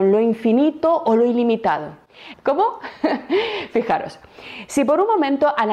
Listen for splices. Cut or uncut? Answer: cut